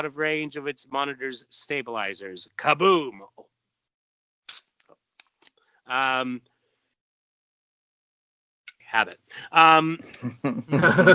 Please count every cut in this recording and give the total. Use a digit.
1